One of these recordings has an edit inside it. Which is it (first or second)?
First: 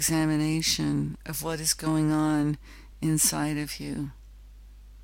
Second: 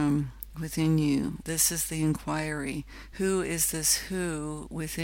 second